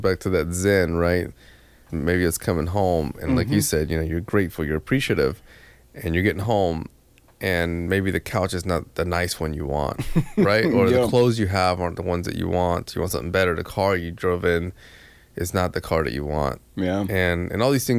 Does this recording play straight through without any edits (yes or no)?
no